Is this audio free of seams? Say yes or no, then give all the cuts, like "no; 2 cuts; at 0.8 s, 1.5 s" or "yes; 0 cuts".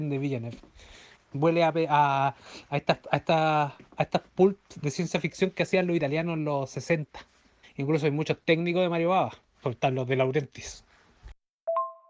no; 2 cuts; at 1.2 s, 7.6 s